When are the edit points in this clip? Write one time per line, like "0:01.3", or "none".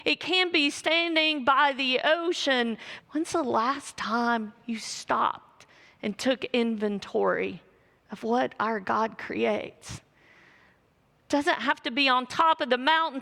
0:03.0